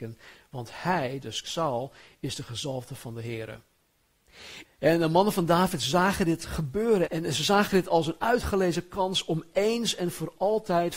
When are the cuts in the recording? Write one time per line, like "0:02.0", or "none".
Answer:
0:04.6
0:07.1